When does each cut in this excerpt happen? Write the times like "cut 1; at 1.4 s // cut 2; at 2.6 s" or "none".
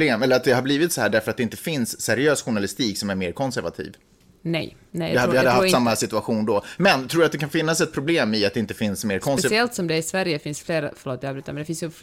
cut 1; at 4.9 s // cut 2; at 6.8 s